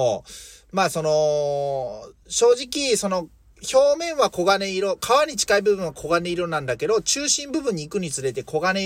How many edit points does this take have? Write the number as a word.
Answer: zero